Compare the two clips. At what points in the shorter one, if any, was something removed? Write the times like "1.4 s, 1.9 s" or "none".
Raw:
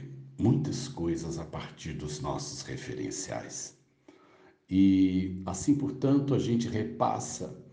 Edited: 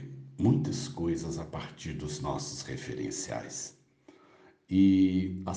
none